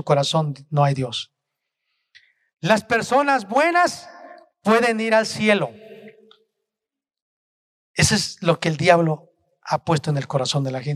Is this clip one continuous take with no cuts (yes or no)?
yes